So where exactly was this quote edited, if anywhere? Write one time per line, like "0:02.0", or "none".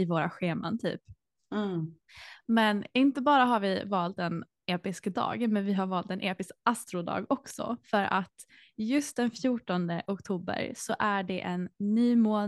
none

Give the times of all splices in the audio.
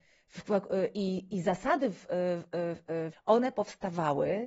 0:03.1

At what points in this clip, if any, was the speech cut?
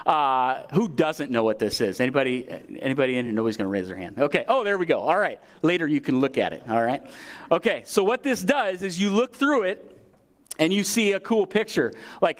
none

